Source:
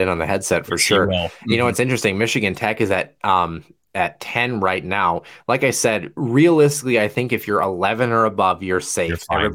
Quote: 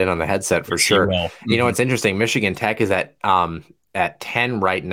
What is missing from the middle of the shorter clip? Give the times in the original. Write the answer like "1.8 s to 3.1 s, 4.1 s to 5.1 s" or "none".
none